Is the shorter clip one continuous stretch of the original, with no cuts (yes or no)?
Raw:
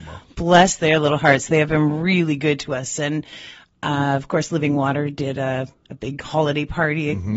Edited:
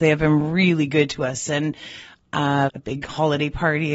no